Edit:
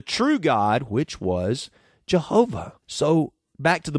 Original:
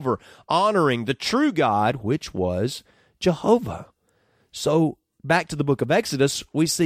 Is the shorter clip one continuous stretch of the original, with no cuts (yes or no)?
no